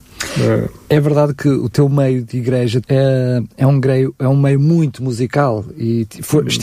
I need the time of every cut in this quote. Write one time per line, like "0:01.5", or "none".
0:02.8